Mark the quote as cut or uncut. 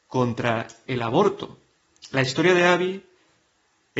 uncut